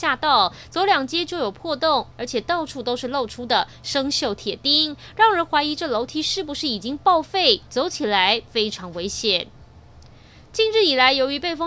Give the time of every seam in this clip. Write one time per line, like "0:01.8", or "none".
0:02.1